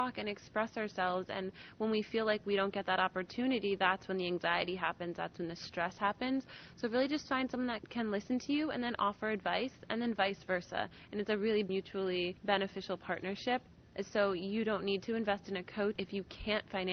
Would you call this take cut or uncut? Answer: uncut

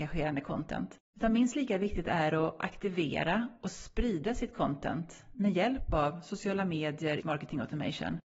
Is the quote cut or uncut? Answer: cut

